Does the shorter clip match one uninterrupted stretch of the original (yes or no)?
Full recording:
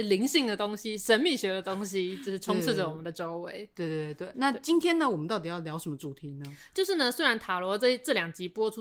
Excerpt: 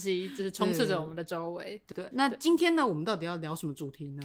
no